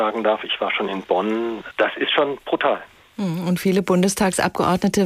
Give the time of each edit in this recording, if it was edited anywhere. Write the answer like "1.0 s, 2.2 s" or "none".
1.7 s